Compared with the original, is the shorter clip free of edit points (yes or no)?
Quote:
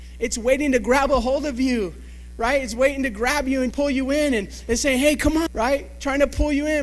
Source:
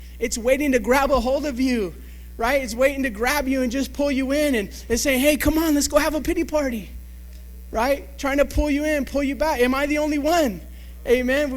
no